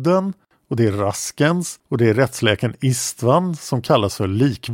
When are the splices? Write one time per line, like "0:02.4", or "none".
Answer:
0:01.8